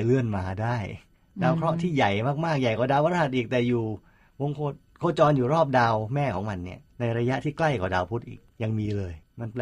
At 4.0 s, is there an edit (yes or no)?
no